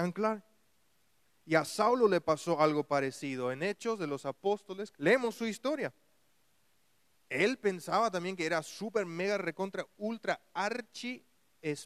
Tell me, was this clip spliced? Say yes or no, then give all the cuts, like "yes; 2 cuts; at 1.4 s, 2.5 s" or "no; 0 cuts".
yes; 1 cut; at 4.9 s